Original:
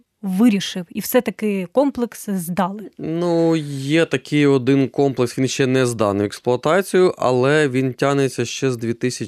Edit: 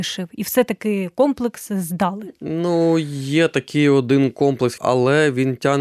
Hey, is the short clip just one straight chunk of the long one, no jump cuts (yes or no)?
no